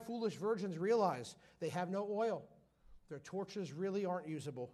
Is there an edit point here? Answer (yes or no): no